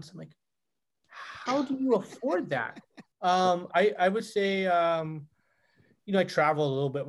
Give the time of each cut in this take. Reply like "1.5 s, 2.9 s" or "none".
3.1 s